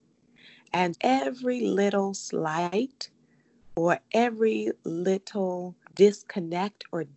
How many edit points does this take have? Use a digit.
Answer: 2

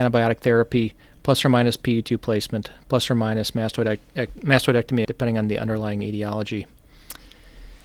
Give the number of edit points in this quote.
1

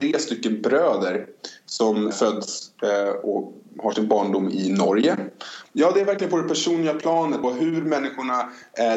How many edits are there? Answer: 3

